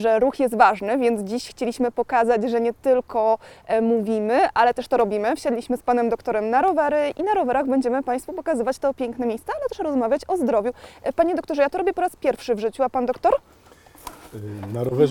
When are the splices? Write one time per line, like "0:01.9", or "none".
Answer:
none